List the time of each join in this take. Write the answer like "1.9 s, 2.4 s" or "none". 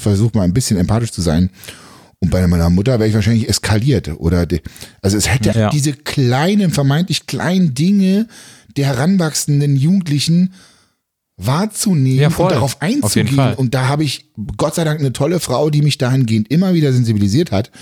5.5 s